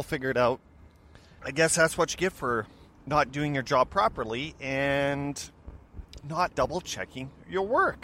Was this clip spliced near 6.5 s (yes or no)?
yes